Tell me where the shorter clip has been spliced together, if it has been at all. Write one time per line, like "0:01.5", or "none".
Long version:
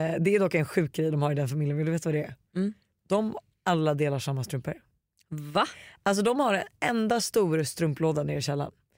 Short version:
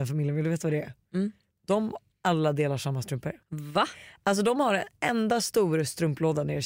0:03.4